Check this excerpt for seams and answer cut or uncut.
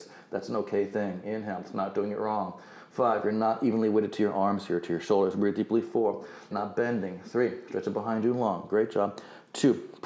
cut